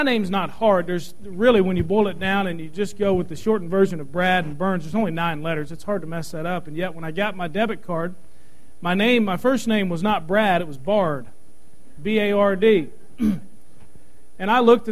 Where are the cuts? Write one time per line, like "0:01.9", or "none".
none